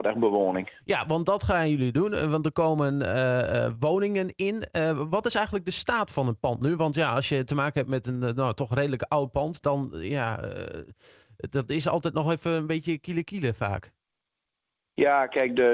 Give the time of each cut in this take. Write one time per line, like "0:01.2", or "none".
none